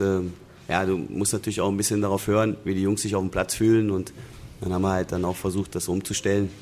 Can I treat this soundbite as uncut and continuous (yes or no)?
yes